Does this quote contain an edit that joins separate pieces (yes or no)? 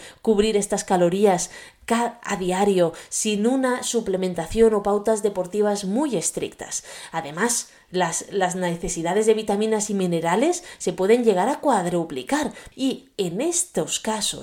yes